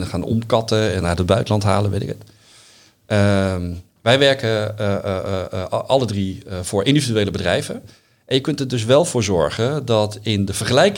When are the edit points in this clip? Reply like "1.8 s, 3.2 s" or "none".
none